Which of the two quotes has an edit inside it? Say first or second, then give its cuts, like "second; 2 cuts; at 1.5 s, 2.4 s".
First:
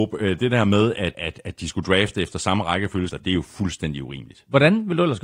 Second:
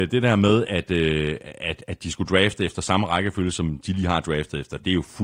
first; 2 cuts; at 1.1 s, 3.1 s